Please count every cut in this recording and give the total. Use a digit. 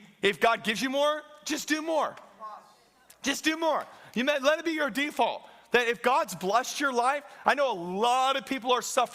0